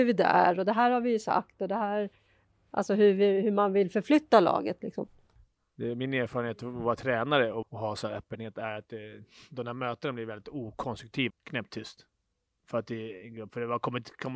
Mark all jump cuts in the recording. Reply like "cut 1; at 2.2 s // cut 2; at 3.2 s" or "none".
cut 1; at 7.6 s // cut 2; at 11.3 s